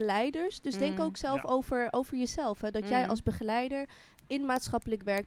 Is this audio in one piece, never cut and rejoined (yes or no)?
yes